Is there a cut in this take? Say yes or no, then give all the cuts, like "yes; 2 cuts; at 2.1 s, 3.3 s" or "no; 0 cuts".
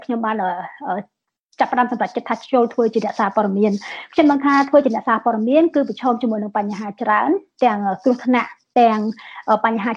no; 0 cuts